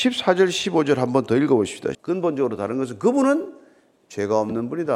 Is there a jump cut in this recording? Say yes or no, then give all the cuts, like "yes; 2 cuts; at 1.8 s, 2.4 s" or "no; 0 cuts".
yes; 1 cut; at 1.9 s